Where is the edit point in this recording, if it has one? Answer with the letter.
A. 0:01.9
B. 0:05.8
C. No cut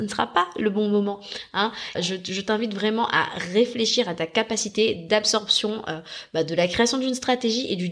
A